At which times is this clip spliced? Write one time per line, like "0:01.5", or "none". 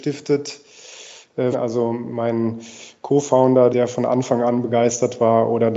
0:01.5
0:03.7